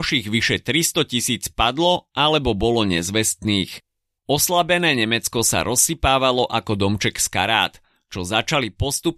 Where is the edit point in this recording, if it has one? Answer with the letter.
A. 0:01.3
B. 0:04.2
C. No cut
B